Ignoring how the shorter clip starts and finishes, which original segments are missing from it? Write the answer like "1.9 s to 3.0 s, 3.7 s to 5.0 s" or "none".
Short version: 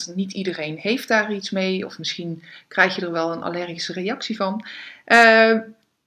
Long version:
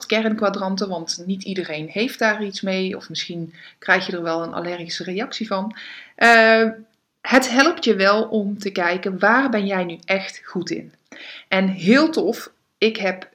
none